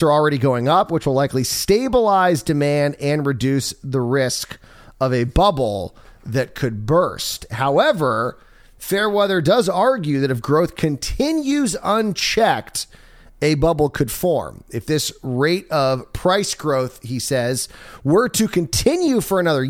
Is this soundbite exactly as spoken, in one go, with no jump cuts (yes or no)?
yes